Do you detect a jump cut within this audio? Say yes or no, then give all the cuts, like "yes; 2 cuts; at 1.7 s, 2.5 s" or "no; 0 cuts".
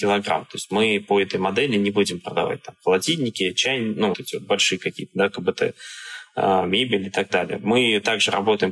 yes; 1 cut; at 4.1 s